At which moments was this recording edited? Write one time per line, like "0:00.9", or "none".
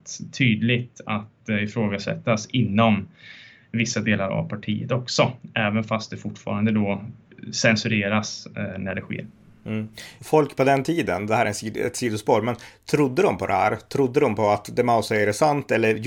0:10.2